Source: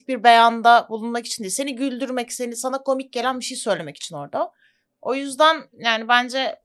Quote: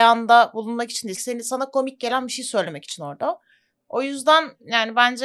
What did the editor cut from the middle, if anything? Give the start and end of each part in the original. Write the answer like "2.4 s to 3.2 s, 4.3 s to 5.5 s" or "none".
1.5 s to 2.3 s